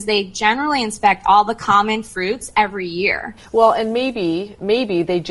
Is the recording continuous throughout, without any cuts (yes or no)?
no